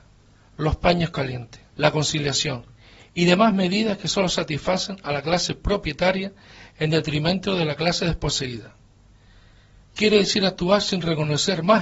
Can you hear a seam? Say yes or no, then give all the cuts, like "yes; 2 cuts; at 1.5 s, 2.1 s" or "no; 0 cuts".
yes; 2 cuts; at 1.7 s, 9.9 s